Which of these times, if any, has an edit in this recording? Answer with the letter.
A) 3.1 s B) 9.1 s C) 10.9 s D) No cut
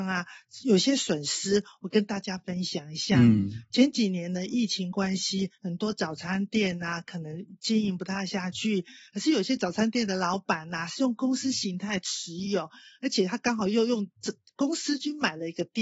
D